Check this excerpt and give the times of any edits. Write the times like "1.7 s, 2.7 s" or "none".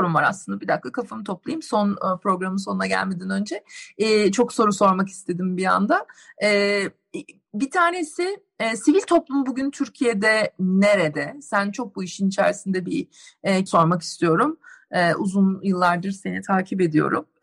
13.7 s